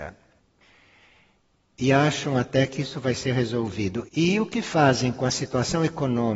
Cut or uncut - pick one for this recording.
cut